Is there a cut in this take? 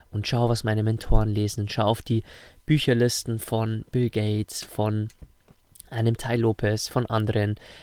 no; 0 cuts

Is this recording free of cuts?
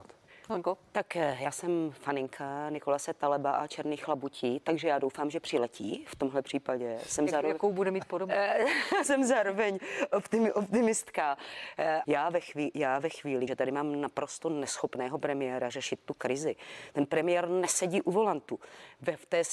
no; 3 cuts; at 9.0 s, 12.0 s, 13.5 s

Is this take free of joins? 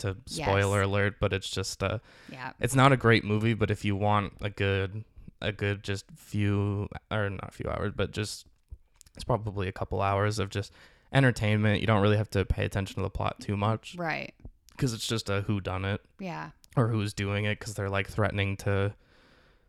yes; 0 cuts

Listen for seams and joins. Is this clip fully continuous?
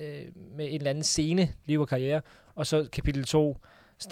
no; 1 cut; at 1.6 s

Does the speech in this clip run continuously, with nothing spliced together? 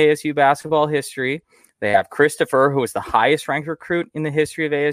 yes; 0 cuts

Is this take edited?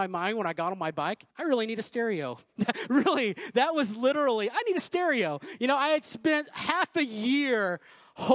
yes; 1 cut; at 1.3 s

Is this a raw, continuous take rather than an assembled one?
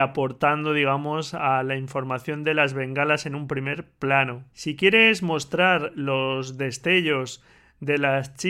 no; 1 cut; at 4.5 s

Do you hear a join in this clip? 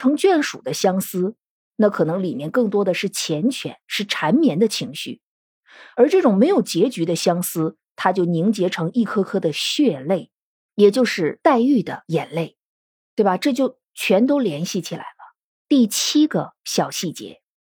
yes; 1 cut; at 15.6 s

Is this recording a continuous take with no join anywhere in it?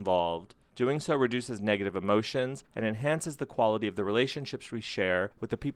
no; 1 cut; at 2.7 s

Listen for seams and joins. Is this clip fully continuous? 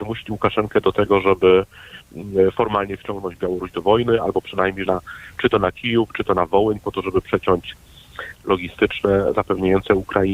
no; 2 cuts; at 4.9 s, 8.4 s

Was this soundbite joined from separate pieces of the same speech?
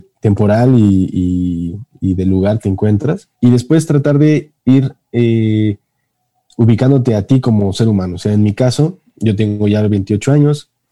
yes; 1 cut; at 3.3 s

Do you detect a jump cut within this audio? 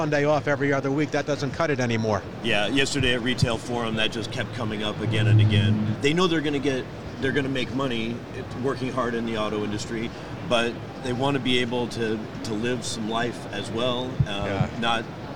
yes; 1 cut; at 5.9 s

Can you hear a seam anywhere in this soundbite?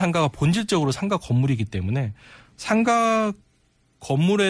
no; 0 cuts

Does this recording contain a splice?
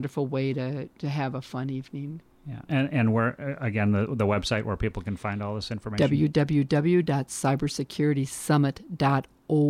no; 0 cuts

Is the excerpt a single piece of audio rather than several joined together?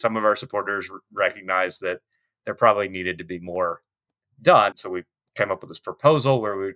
no; 1 cut; at 4.7 s

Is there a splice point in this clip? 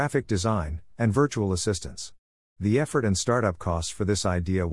yes; 1 cut; at 0.9 s

